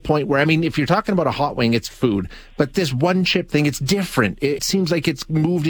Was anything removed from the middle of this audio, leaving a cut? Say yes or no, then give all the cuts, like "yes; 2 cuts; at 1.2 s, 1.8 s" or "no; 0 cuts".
yes; 1 cut; at 4.6 s